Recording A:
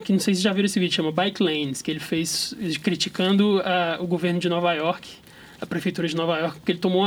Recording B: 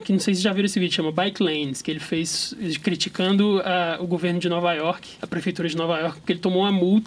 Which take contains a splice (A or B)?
B